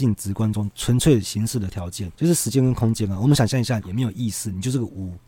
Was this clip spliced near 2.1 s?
yes; 2 cuts; at 2.1 s, 3.8 s

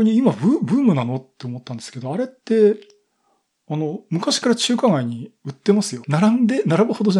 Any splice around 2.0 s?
no; 1 cut; at 6.0 s

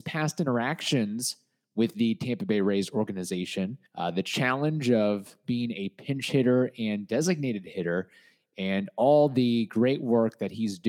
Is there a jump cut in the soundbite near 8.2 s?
no; 1 cut; at 3.9 s

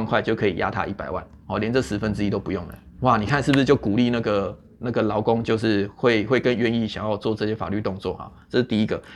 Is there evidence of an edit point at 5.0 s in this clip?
no; 3 cuts; at 1.4 s, 3.0 s, 6.3 s

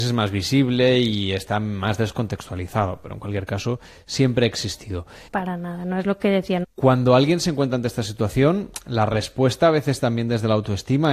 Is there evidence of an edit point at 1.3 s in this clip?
no; 2 cuts; at 5.3 s, 6.6 s

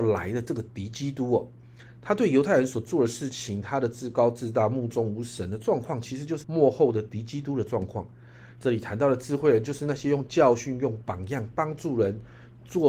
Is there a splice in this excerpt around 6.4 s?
yes; 2 cuts; at 6.4 s, 8.6 s

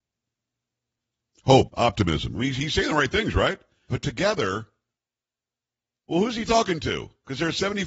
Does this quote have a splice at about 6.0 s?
no; 2 cuts; at 1.7 s, 3.9 s

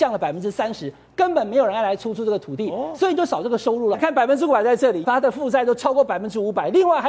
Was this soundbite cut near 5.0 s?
yes; 2 cuts; at 3.9 s, 5.0 s

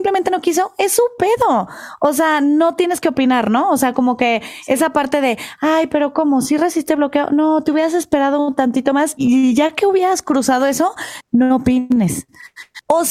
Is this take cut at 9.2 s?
yes; 2 cuts; at 9.2 s, 11.2 s

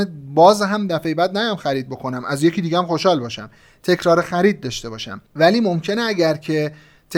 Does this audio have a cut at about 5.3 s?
yes; 1 cut; at 5.3 s

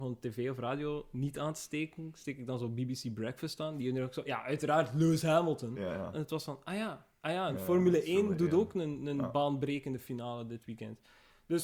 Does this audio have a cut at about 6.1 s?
yes; 1 cut; at 6.1 s

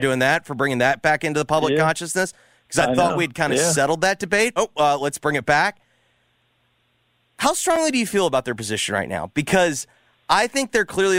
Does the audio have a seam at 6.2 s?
no; 1 cut; at 4.6 s

